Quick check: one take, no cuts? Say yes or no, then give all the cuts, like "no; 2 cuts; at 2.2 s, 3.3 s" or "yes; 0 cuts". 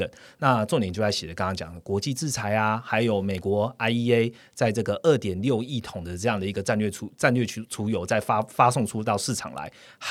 yes; 0 cuts